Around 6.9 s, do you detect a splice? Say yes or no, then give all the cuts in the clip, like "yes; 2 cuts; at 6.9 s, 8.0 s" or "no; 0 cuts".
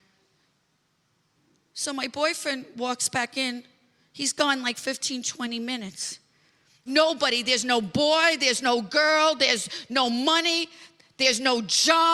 yes; 1 cut; at 6.9 s